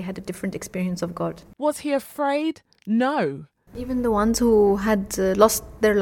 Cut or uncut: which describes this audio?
cut